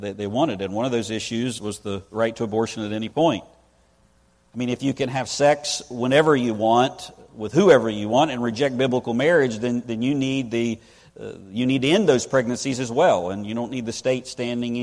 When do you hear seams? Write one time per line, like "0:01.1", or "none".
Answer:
0:01.6